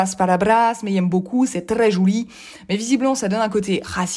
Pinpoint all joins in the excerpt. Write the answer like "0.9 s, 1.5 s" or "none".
none